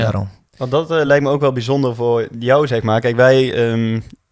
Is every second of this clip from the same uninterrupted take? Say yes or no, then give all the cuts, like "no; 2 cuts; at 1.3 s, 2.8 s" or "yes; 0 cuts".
yes; 0 cuts